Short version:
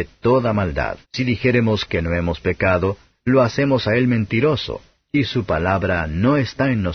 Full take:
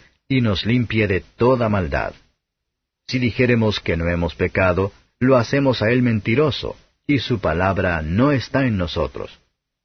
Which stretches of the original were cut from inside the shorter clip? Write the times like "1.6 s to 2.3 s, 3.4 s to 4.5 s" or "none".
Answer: 2.2 s to 3.0 s